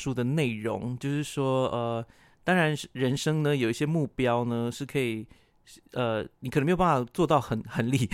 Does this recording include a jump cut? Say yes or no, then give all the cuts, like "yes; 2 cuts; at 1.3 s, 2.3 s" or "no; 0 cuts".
no; 0 cuts